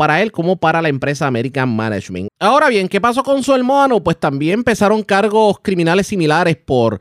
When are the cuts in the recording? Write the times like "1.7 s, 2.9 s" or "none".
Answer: 2.3 s